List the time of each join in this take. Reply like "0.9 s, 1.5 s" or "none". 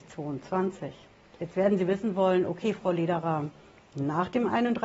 1.3 s